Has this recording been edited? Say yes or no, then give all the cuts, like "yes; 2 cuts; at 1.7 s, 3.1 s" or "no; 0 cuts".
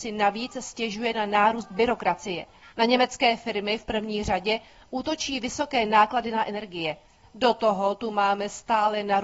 yes; 2 cuts; at 2.7 s, 7.2 s